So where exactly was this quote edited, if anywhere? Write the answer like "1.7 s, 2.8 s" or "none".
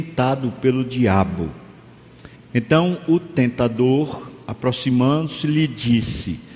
2.4 s